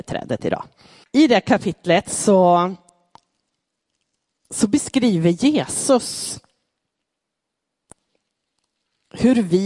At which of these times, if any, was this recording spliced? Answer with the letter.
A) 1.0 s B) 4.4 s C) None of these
A